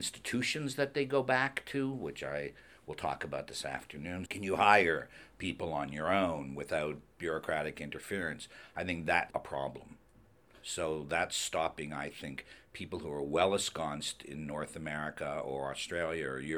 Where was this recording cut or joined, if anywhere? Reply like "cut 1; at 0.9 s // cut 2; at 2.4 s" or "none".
cut 1; at 4.3 s // cut 2; at 9.3 s